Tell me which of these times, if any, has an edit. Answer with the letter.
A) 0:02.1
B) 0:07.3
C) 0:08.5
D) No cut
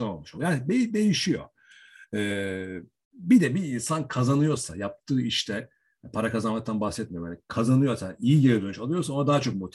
D